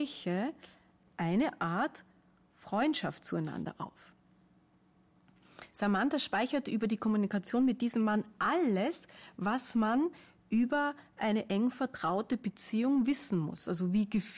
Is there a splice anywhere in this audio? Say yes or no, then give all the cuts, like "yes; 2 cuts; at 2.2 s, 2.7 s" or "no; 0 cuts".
no; 0 cuts